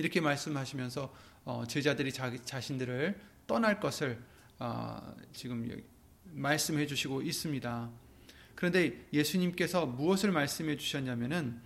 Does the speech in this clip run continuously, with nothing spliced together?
yes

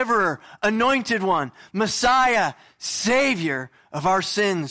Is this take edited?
no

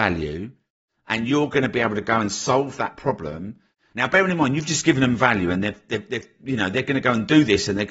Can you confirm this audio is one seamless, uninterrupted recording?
no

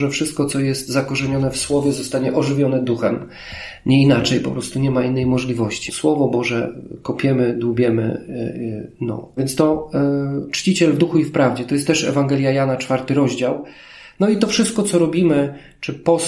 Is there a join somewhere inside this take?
yes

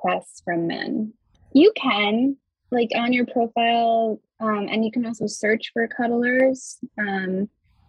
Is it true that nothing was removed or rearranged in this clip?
no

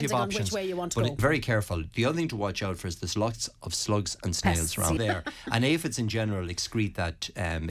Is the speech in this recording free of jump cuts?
no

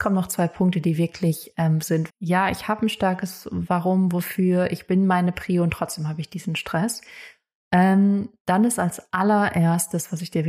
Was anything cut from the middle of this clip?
yes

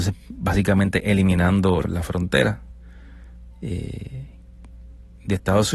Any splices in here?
yes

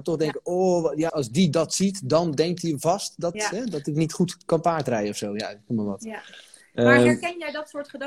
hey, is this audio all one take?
no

